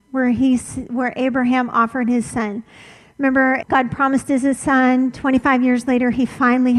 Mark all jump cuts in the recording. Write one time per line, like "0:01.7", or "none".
0:03.6